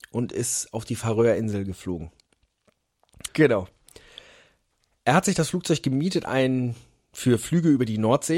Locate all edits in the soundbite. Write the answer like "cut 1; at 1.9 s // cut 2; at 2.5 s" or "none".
cut 1; at 3.3 s // cut 2; at 6.3 s